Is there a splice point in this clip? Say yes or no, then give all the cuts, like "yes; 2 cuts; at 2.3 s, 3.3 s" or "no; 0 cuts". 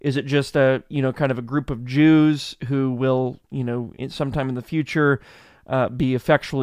no; 0 cuts